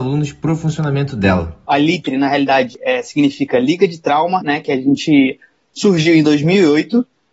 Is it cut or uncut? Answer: cut